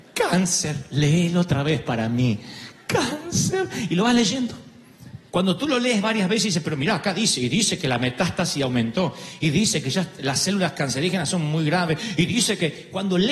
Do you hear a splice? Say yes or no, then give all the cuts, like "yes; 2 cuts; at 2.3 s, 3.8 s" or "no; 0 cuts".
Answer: yes; 1 cut; at 5.3 s